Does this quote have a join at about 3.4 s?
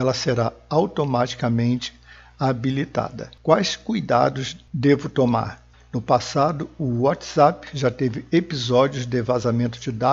no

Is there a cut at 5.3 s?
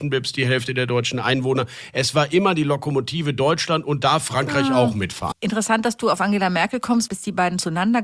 yes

